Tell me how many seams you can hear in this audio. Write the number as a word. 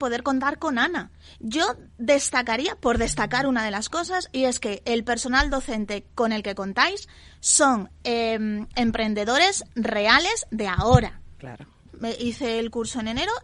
two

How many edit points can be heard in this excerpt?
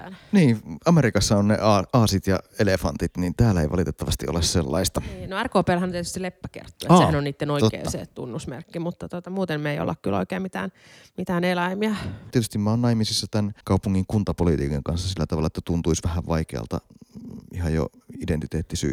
two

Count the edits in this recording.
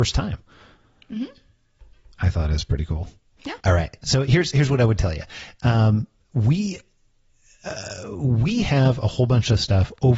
one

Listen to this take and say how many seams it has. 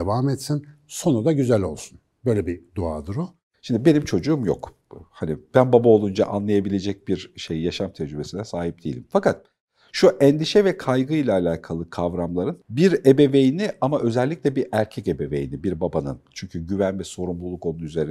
one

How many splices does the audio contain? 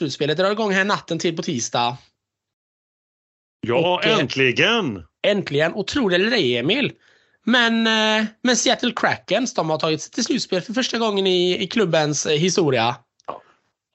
zero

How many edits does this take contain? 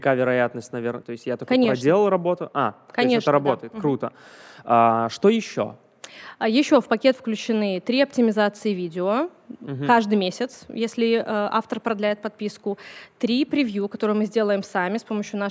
one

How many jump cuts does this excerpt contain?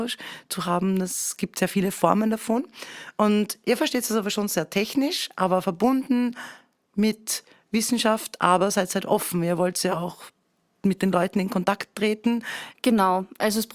one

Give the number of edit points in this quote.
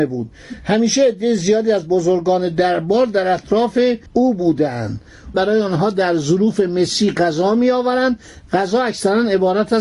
two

